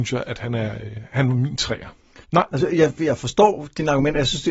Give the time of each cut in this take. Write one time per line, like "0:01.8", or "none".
0:02.2